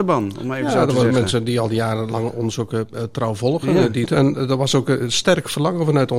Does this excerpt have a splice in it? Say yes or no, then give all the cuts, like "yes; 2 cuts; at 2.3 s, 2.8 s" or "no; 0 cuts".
yes; 1 cut; at 4.1 s